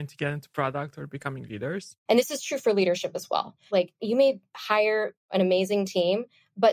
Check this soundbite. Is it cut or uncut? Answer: cut